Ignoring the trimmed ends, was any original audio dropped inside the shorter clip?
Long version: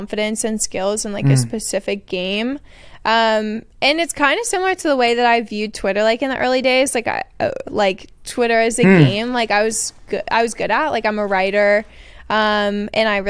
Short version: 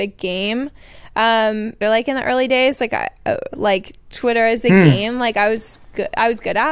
yes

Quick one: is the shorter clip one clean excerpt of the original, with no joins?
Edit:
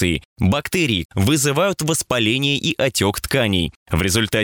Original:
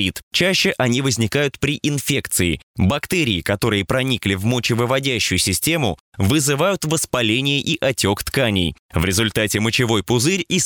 no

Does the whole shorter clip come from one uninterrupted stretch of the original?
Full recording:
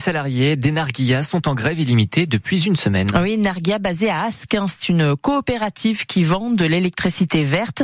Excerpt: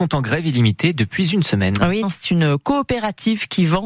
no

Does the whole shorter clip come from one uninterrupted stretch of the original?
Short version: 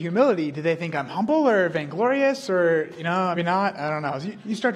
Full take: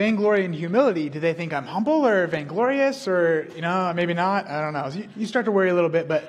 no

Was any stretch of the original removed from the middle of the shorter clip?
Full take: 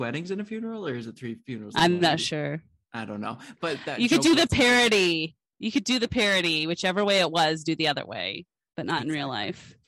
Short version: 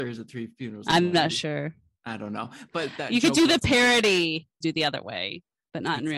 yes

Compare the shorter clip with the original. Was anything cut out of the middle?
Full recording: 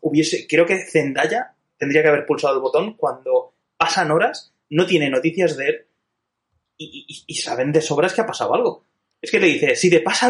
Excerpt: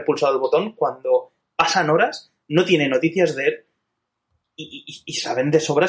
no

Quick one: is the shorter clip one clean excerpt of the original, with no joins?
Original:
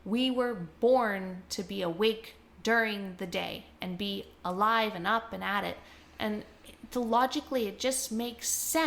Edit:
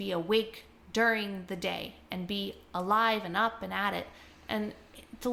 yes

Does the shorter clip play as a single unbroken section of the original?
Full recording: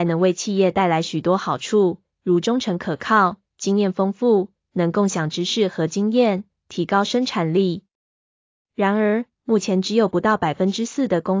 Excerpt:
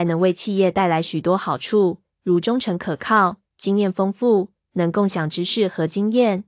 yes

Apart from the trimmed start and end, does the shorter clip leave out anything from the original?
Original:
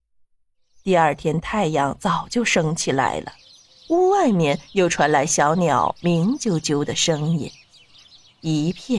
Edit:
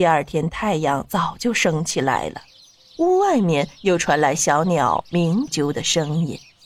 yes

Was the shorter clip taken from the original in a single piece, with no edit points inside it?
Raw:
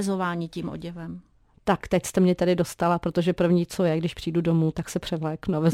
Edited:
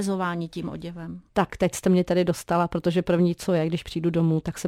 no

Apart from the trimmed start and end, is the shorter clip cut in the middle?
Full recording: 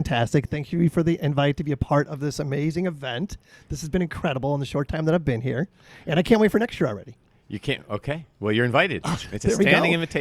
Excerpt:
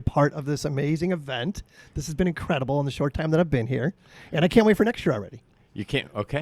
no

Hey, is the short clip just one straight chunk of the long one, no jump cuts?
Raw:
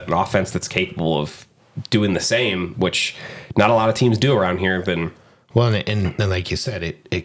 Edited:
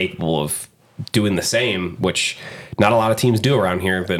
yes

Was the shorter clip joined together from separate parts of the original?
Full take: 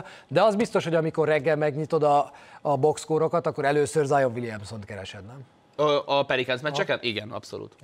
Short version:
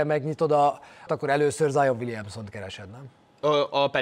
yes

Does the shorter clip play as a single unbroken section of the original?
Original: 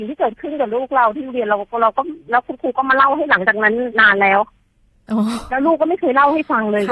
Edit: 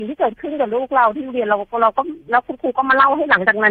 yes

